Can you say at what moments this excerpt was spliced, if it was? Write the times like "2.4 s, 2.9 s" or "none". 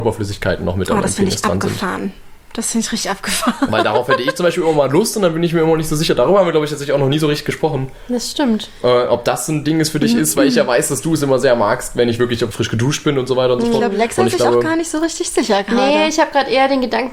12.5 s